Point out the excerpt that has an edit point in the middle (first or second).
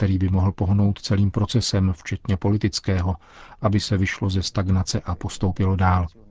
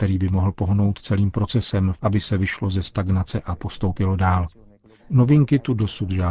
second